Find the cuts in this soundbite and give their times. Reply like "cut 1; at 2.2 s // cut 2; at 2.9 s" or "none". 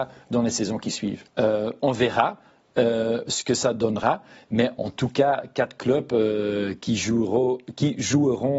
cut 1; at 1.3 s